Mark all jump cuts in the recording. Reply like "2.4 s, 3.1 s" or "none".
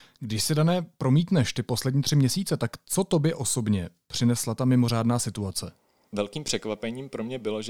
6.1 s